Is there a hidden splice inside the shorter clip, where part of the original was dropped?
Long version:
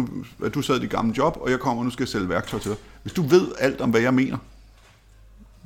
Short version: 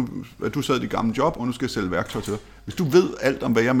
yes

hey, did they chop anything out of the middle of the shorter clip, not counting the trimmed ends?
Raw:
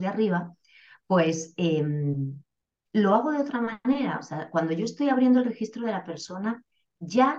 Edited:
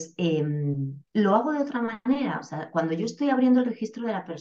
yes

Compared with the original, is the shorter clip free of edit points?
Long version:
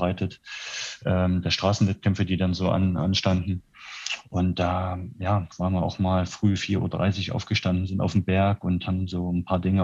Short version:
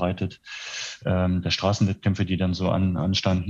yes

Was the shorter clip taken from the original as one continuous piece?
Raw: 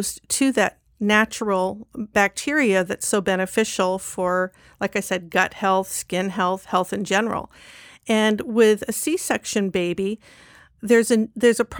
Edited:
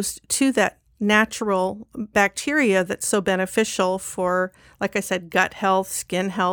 yes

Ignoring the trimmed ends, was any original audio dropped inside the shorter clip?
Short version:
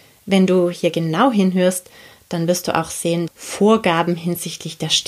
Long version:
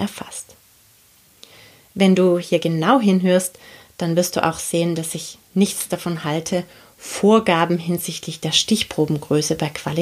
yes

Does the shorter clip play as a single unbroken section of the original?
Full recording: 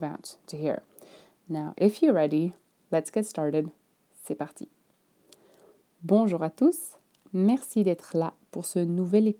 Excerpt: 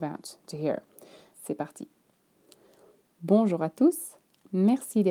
no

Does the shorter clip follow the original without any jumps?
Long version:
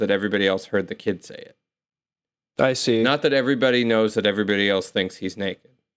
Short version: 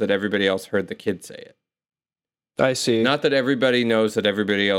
yes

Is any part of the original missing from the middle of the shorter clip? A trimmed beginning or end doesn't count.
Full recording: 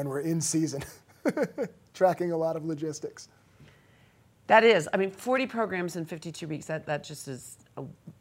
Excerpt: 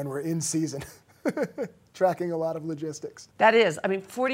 yes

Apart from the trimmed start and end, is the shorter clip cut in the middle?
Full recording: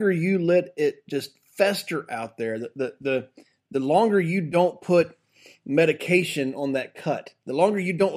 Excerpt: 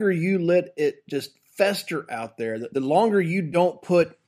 yes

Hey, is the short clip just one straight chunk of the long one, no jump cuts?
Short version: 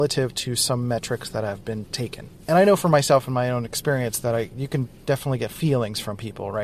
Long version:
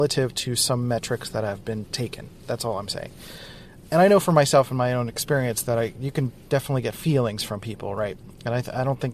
no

